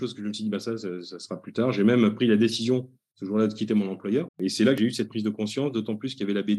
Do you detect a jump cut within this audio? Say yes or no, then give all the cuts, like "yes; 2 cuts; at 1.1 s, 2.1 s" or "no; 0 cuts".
yes; 1 cut; at 4.3 s